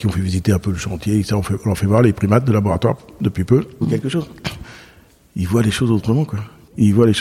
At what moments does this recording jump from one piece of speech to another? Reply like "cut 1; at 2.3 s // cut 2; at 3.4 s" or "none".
cut 1; at 3.8 s